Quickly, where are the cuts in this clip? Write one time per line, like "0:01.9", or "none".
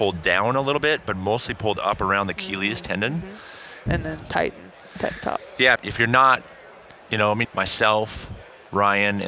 0:03.9
0:05.7
0:07.4